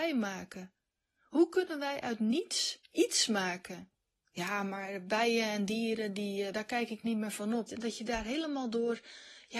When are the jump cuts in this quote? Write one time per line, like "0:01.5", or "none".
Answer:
0:04.2
0:06.5
0:07.7